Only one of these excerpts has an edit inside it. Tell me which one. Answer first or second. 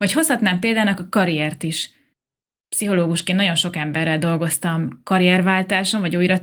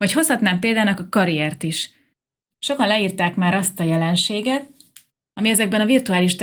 second